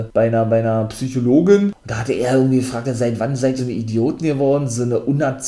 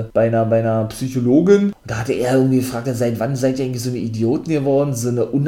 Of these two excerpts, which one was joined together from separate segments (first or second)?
first